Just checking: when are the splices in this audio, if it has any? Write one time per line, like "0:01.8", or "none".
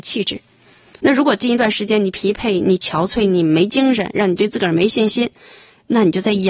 0:01.0